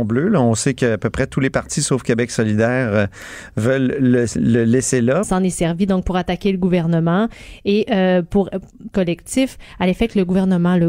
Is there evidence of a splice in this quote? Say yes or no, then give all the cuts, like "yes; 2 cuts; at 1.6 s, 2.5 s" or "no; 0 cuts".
yes; 2 cuts; at 5.2 s, 8.9 s